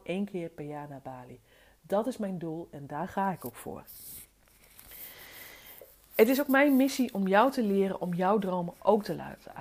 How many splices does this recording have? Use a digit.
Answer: 0